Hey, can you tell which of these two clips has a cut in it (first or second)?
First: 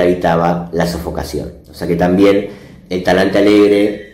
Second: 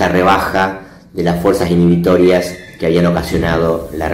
first